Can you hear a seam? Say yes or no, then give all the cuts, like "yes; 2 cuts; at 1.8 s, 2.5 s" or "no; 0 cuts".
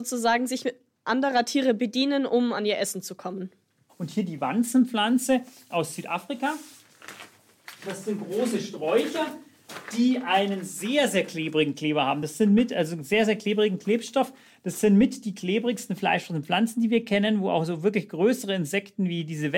no; 0 cuts